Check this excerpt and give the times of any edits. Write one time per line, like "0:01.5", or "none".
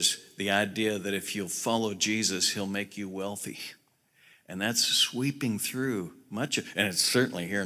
none